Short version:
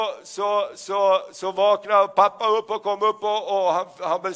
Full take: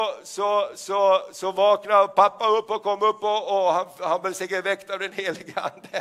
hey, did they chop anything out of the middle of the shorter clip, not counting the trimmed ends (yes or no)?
no